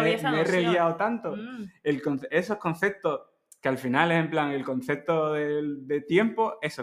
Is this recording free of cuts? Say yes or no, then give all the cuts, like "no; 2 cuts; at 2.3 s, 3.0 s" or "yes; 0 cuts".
yes; 0 cuts